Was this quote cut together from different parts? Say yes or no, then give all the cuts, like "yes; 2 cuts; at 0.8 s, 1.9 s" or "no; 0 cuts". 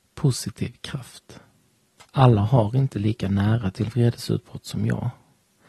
yes; 1 cut; at 2.0 s